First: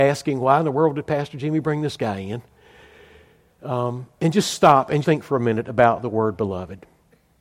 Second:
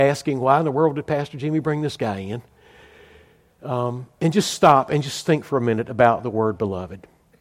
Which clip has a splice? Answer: first; 1 cut; at 5.0 s

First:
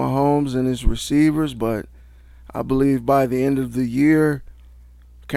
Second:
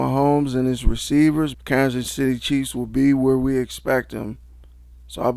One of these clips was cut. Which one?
second; 1 cut; at 1.5 s

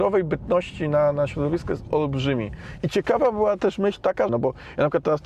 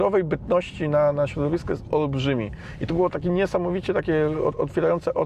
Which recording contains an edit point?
first; 2 cuts; at 2.8 s, 4.3 s

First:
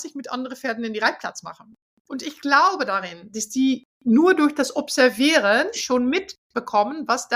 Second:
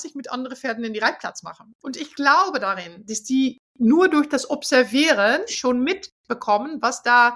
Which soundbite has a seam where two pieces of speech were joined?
second; 1 cut; at 1.7 s

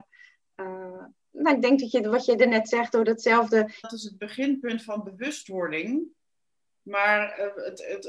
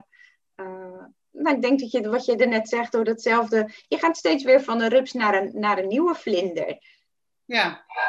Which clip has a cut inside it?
first; 1 cut; at 3.8 s

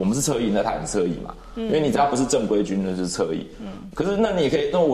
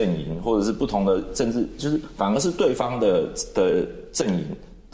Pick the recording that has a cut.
first; 1 cut; at 3.9 s

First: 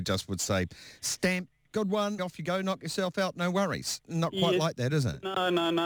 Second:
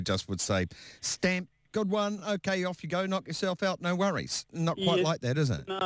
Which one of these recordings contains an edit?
first; 1 cut; at 2.2 s

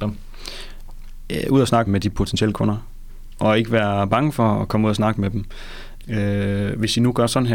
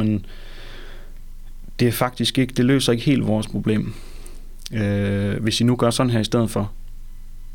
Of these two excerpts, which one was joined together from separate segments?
first; 2 cuts; at 1.9 s, 6.0 s

